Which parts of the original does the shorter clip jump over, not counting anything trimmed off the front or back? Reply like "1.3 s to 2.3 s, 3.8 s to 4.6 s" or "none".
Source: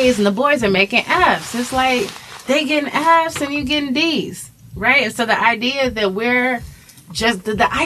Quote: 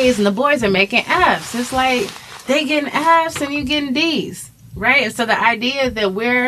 none